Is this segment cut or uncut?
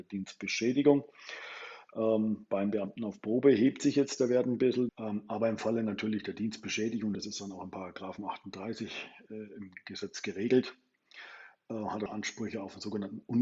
cut